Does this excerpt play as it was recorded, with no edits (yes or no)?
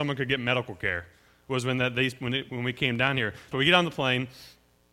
no